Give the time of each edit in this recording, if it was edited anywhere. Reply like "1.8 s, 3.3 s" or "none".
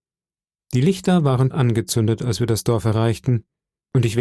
1.5 s